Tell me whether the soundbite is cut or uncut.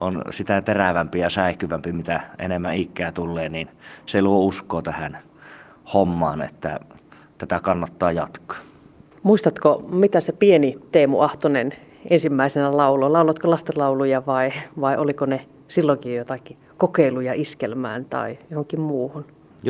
uncut